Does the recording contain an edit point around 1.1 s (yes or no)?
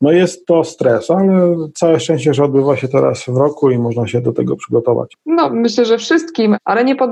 no